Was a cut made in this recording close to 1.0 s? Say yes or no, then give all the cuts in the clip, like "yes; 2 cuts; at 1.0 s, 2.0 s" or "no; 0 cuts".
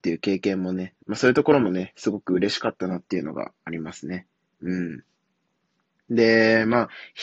yes; 1 cut; at 1.0 s